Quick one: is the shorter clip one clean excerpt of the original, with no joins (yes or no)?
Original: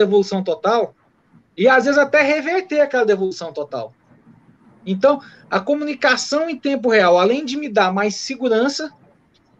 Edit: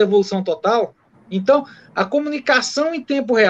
no